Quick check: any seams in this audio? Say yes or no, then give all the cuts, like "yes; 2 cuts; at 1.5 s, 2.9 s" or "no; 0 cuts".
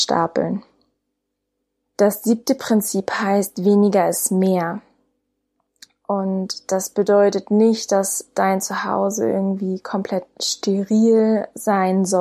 no; 0 cuts